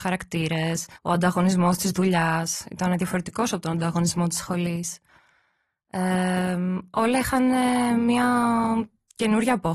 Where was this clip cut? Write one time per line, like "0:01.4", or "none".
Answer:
0:01.0